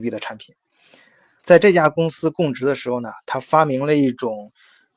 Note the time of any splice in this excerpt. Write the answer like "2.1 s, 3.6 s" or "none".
1.4 s